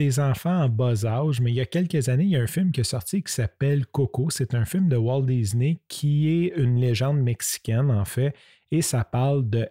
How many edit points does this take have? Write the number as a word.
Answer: zero